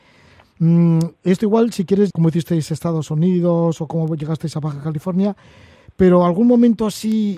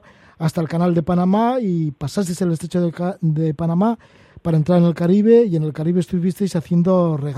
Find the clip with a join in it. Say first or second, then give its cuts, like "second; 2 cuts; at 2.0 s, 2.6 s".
first; 1 cut; at 2.1 s